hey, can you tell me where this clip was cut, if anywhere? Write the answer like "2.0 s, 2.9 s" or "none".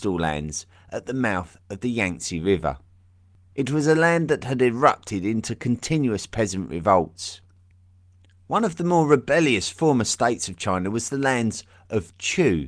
3.5 s